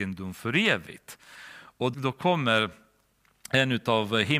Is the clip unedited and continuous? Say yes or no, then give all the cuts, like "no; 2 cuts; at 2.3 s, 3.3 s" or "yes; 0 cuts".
no; 1 cut; at 1.9 s